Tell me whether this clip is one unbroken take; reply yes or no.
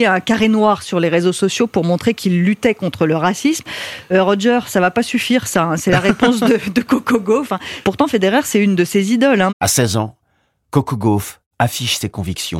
no